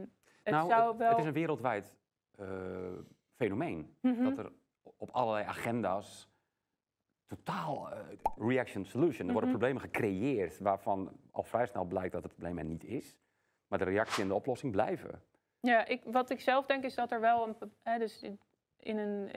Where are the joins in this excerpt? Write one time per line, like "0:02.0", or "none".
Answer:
0:08.4